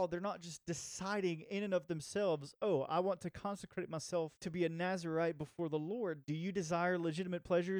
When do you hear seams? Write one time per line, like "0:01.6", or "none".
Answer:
0:04.4
0:06.2